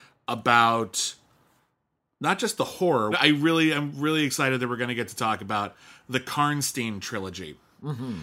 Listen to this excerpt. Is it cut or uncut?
cut